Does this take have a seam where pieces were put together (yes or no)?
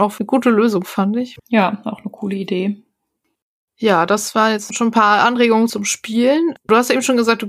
no